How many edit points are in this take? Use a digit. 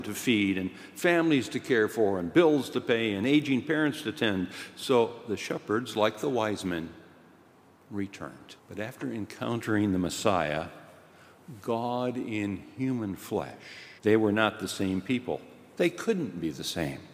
2